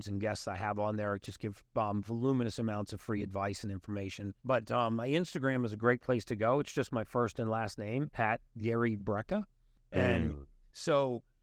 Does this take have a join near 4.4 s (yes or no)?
yes